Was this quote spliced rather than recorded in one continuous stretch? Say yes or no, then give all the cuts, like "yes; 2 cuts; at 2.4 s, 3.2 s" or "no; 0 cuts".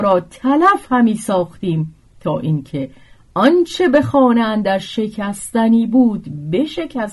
no; 0 cuts